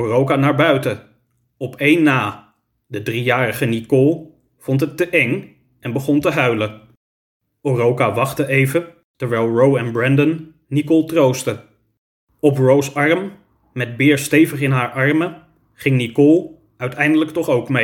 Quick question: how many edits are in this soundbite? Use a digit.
0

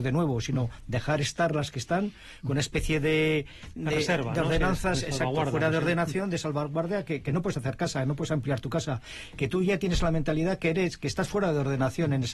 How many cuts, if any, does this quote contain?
1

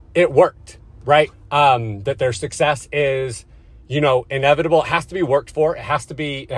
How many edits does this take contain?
1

